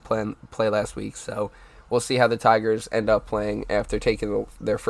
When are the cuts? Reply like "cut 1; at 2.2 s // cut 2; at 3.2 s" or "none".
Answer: none